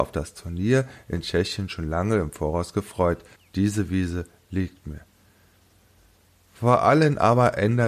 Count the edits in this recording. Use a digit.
1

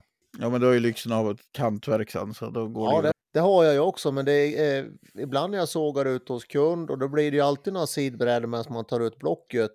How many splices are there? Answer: 1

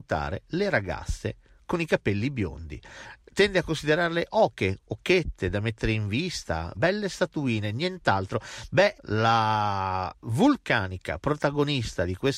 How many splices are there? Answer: 2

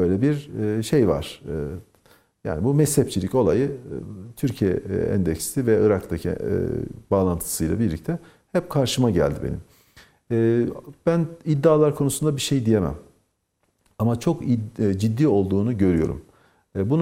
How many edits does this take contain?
0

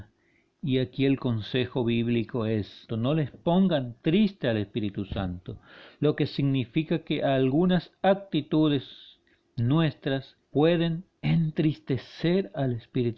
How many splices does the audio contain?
2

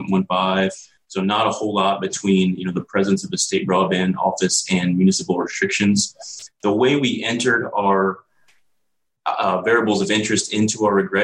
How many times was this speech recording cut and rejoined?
0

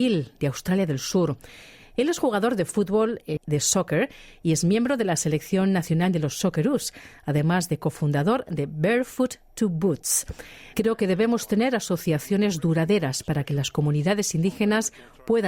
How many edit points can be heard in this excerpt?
2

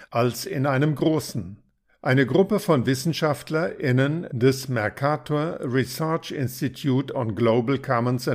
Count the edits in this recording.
1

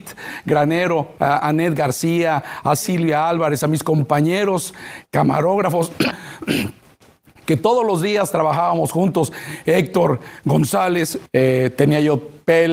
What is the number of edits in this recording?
3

